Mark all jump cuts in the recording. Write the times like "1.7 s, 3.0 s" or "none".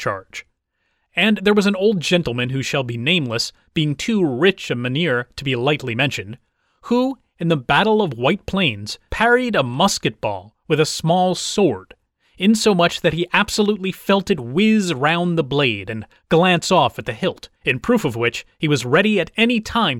9.1 s, 17.6 s